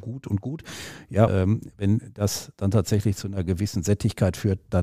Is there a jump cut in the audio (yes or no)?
yes